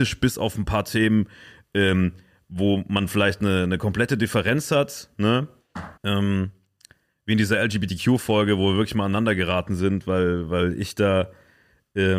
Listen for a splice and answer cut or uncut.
cut